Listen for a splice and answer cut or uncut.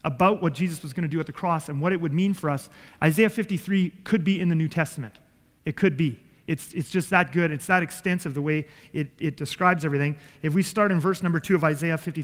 uncut